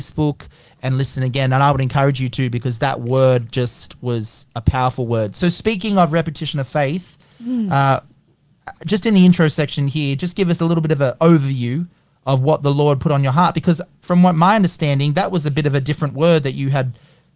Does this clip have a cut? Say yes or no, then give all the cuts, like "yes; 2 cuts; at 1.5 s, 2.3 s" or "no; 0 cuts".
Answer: no; 0 cuts